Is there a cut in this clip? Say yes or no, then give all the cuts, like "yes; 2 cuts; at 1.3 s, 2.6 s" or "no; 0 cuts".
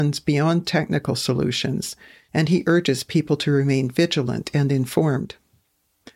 no; 0 cuts